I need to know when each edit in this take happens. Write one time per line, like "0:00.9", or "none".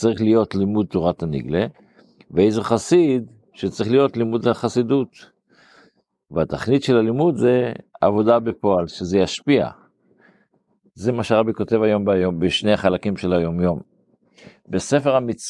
0:03.5